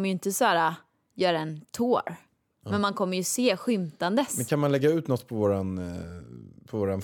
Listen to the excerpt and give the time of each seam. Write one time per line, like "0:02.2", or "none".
none